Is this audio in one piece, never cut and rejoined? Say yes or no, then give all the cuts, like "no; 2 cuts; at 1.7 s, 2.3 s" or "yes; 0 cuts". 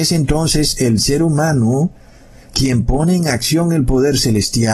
yes; 0 cuts